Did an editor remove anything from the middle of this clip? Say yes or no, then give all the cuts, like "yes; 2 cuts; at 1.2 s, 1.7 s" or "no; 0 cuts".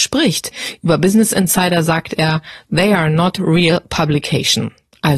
no; 0 cuts